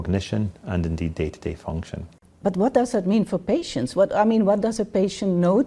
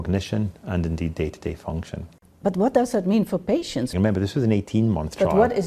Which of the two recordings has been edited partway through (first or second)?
second